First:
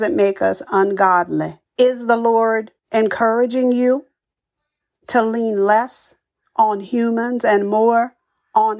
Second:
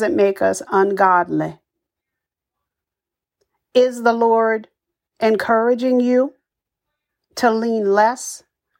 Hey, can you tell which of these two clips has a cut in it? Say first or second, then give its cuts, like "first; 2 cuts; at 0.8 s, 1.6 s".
first; 2 cuts; at 1.7 s, 2.8 s